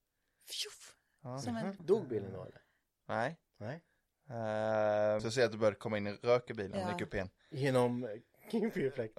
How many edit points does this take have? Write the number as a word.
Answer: two